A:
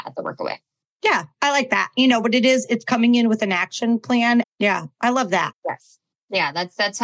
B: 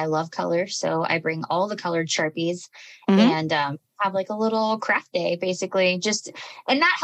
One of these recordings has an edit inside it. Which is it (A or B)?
A